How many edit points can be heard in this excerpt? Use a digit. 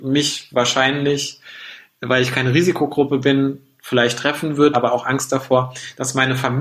1